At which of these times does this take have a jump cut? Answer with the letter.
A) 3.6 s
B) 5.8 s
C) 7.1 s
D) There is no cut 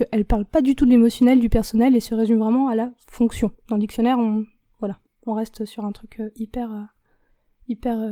D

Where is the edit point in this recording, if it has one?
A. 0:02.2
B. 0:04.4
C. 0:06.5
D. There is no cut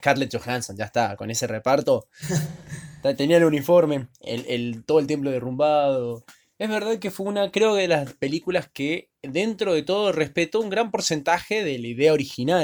A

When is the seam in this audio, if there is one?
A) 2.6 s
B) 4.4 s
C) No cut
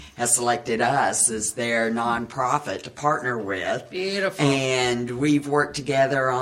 C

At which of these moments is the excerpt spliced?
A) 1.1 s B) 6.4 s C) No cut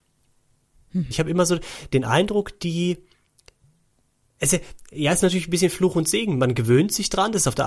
A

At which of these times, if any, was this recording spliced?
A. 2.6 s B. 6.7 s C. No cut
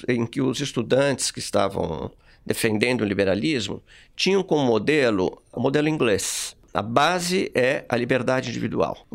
B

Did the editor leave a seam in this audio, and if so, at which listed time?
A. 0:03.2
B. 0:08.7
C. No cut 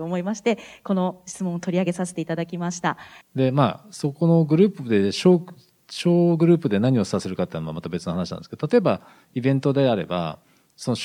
A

